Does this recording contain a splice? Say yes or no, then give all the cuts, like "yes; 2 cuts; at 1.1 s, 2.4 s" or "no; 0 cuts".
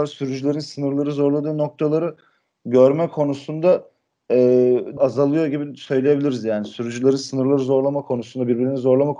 yes; 1 cut; at 5.0 s